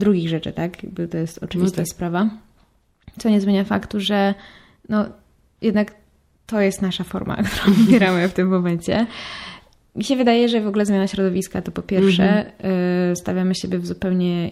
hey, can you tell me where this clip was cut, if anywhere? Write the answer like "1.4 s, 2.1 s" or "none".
none